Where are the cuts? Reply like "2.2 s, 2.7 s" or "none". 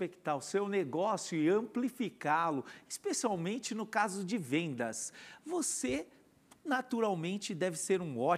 none